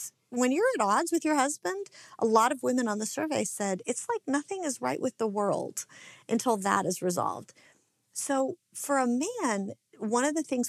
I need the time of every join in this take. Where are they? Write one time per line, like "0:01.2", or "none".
none